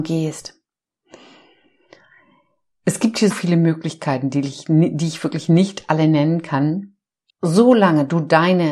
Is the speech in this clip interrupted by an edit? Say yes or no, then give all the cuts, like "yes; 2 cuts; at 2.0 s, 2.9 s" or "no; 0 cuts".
yes; 2 cuts; at 3.3 s, 7.3 s